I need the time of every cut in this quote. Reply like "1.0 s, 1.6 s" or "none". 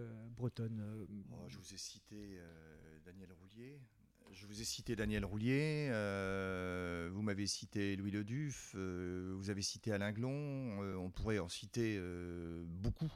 none